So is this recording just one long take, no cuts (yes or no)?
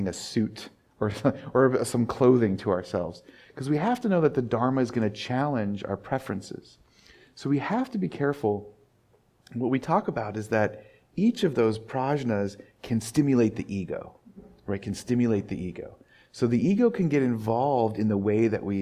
yes